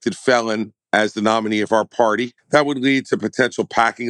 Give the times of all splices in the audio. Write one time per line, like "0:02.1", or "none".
0:02.4